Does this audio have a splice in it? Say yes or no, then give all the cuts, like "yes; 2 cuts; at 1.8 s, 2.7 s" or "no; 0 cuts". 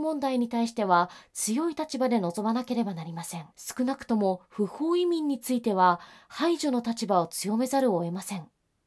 yes; 1 cut; at 3.5 s